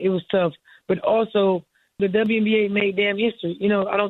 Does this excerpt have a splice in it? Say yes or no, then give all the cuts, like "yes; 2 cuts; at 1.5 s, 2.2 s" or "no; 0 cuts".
yes; 1 cut; at 2.0 s